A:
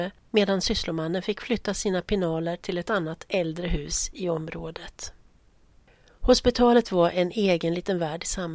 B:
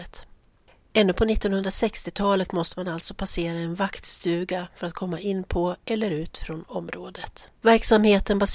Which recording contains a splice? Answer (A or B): B